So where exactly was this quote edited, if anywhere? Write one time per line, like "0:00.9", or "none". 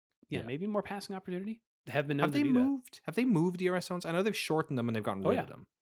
0:01.8